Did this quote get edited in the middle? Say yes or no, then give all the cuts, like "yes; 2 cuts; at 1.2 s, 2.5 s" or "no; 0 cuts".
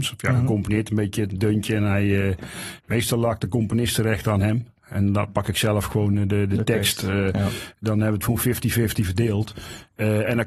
no; 0 cuts